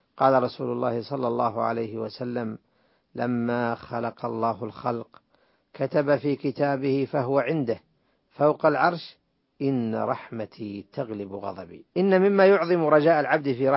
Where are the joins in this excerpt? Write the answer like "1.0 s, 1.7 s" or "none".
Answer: 11.9 s